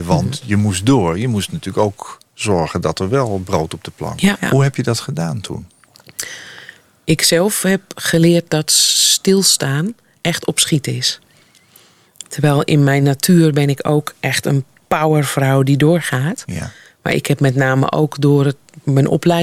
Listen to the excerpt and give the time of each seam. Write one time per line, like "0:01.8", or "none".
0:04.3